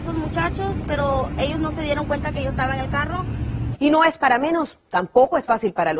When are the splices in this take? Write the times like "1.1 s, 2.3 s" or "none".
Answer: 3.7 s